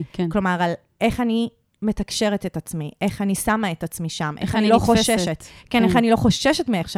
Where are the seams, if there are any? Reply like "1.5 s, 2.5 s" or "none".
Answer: none